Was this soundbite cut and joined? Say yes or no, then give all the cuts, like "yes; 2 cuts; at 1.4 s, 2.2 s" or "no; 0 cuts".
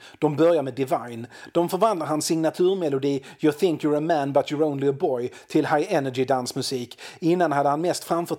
no; 0 cuts